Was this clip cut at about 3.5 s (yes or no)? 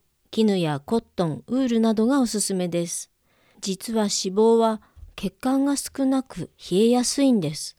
yes